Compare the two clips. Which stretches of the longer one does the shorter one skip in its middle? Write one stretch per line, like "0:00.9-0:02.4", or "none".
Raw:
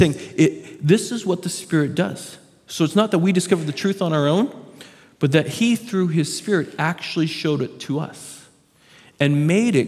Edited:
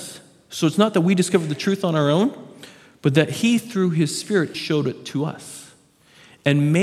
0:06.7-0:07.3